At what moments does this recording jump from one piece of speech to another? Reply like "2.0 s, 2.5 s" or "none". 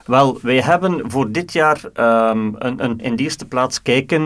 3.0 s